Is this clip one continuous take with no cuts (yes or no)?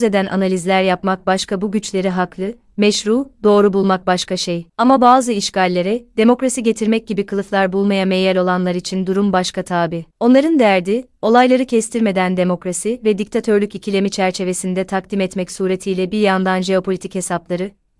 yes